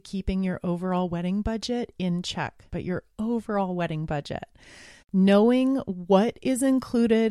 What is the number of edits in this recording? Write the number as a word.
two